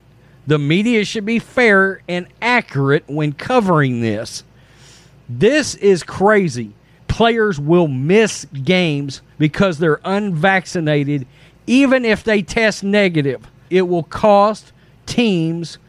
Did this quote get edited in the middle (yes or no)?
yes